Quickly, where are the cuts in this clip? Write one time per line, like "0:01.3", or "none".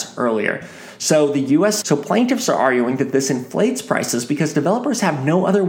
0:01.8